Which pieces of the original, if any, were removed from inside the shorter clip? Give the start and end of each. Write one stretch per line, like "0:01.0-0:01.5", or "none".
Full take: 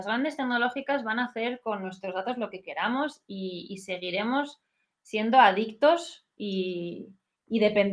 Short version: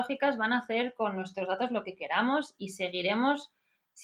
0:03.3-0:03.7